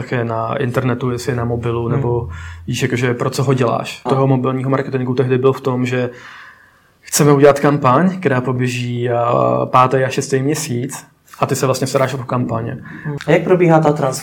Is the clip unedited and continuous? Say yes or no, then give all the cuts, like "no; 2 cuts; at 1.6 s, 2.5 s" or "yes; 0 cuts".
no; 2 cuts; at 4.1 s, 13.2 s